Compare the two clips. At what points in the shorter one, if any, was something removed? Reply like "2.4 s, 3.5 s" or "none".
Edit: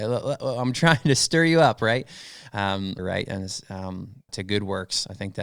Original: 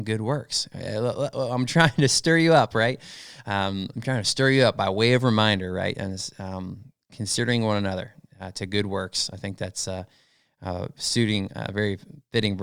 3.0 s, 4.3 s